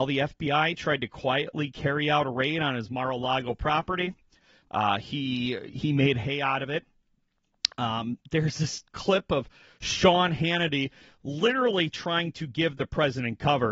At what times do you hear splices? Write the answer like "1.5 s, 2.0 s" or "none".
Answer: 5.7 s